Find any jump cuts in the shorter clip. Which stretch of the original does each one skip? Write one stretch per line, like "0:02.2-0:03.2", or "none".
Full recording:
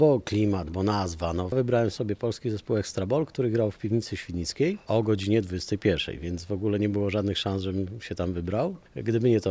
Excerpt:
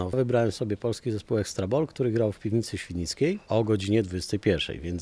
none